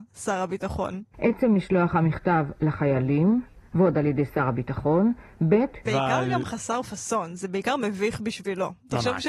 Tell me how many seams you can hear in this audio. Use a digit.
2